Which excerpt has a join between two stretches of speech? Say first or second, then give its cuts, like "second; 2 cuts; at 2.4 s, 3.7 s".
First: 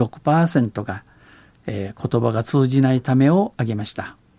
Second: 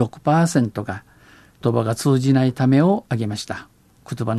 second; 1 cut; at 1.6 s